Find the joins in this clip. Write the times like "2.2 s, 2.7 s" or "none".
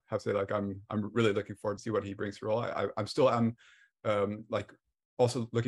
1.8 s